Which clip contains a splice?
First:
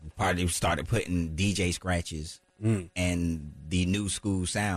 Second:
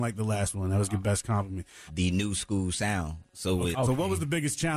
second; 2 cuts; at 1.9 s, 3.7 s

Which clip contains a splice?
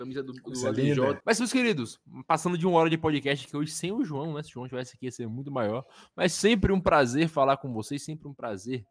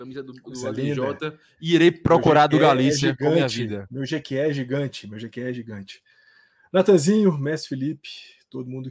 first; 1 cut; at 1.2 s

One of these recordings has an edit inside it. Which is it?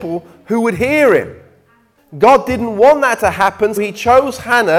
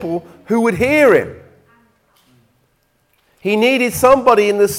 first; 2 cuts; at 2.0 s, 3.8 s

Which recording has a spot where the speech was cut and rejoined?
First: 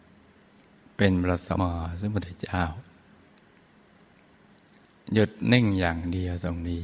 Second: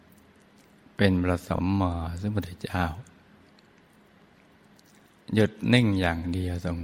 first; 1 cut; at 1.6 s

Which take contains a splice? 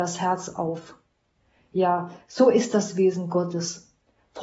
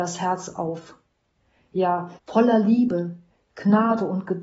second; 1 cut; at 2.2 s

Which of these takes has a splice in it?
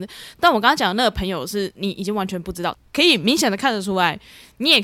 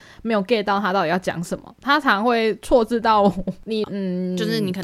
second; 1 cut; at 3.8 s

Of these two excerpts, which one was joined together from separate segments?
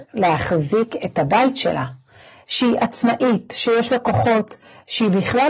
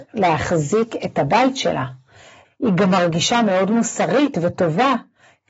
second; 1 cut; at 2.4 s

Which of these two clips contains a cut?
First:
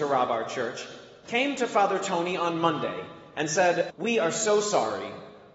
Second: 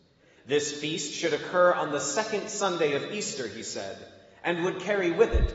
first; 1 cut; at 3.9 s

